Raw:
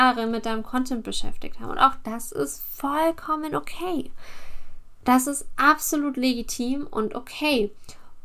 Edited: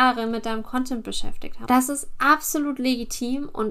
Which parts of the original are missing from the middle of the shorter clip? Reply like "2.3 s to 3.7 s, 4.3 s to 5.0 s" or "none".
1.7 s to 5.0 s